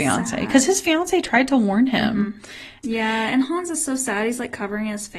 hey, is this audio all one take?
no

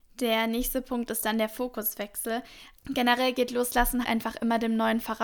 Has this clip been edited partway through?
yes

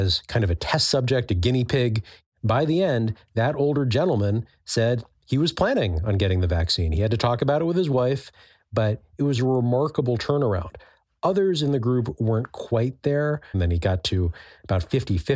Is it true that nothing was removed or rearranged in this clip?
no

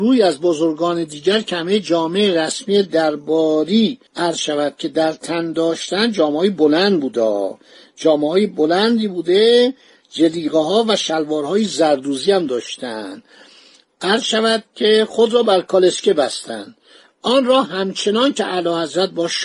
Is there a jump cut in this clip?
yes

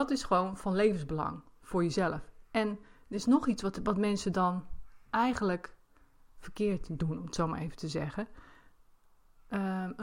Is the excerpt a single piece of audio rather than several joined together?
yes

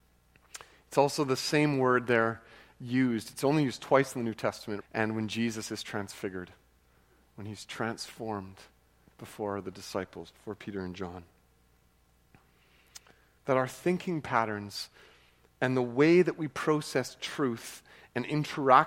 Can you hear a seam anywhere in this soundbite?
yes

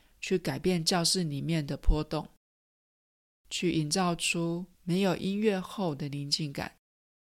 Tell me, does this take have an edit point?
yes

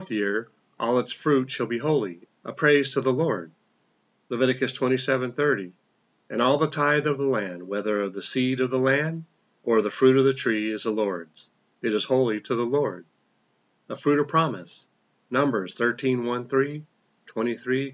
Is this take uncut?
yes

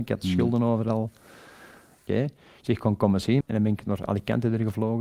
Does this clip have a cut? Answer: yes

